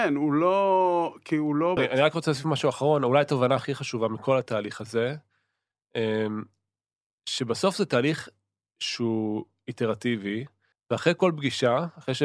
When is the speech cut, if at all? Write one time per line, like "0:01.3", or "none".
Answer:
0:01.8
0:10.7